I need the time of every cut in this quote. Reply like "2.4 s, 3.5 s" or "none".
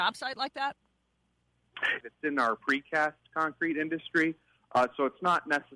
2.0 s